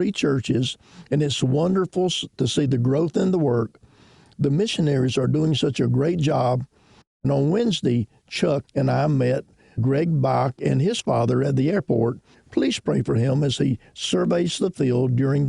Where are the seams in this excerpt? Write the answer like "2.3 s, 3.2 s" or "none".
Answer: 8.6 s, 12.3 s